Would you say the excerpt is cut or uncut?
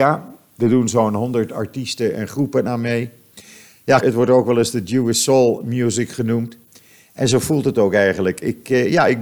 cut